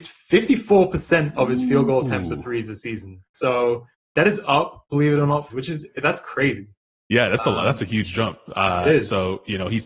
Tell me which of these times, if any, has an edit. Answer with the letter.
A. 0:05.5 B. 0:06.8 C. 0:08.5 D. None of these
A